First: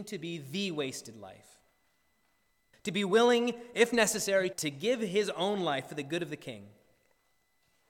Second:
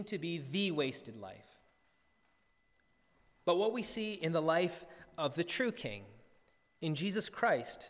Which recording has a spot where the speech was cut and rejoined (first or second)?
first